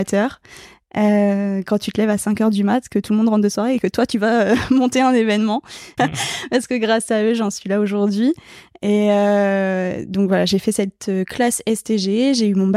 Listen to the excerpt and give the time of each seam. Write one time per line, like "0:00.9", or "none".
0:06.0